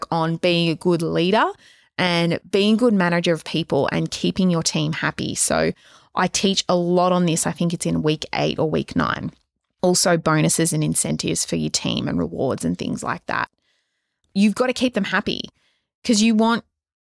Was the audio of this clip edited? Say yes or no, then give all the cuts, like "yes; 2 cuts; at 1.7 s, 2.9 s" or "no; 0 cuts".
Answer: yes; 1 cut; at 14.2 s